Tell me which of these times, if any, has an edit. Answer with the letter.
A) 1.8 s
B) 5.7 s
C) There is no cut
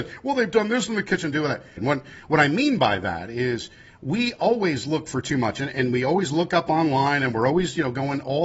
A